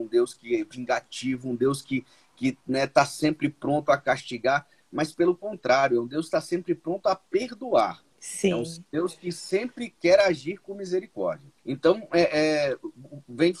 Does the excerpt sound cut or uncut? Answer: cut